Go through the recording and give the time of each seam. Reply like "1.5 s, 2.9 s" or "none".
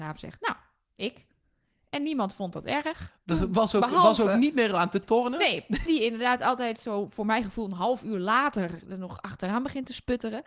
5.9 s